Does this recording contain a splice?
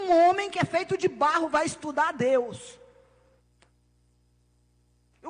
no; 0 cuts

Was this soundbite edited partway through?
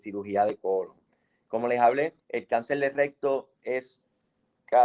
yes; 1 cut; at 2.2 s

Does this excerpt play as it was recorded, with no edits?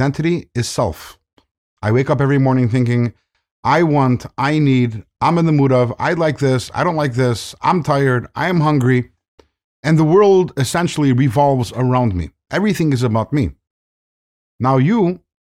yes; 0 cuts

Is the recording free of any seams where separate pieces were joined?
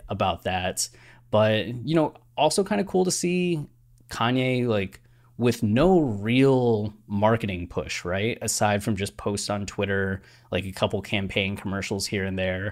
yes; 0 cuts

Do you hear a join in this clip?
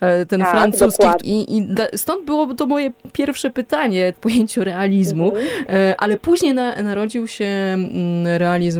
yes; 2 cuts; at 1.2 s, 4.1 s

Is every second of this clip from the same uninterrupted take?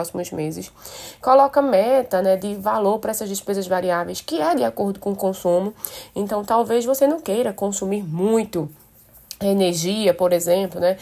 yes; 0 cuts

